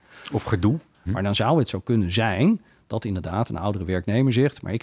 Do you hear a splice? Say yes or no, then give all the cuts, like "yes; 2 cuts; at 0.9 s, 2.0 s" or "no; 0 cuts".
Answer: yes; 1 cut; at 1.1 s